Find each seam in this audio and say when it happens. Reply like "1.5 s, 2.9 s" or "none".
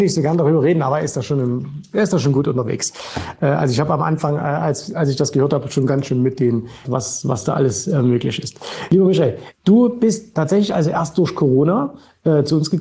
6.8 s